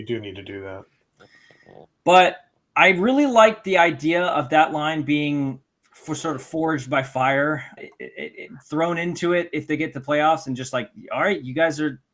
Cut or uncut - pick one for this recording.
cut